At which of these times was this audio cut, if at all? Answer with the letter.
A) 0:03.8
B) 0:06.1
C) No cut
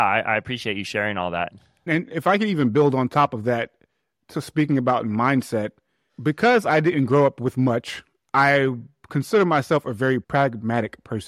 C